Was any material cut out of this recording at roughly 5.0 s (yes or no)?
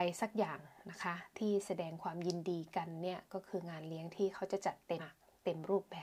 yes